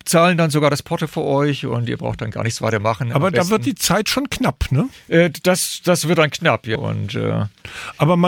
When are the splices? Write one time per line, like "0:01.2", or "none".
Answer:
0:06.8